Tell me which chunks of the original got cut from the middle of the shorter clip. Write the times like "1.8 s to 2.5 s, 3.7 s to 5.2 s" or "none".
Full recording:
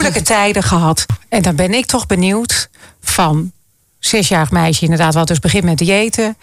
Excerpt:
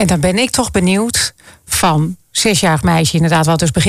3.6 s to 3.9 s